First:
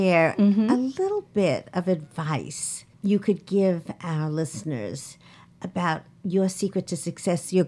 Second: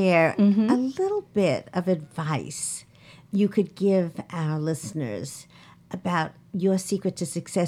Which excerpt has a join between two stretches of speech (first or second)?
first